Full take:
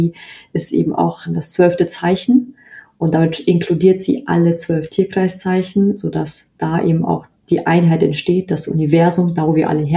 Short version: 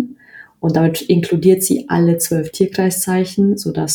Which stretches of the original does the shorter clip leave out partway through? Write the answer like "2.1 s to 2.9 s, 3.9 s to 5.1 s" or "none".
none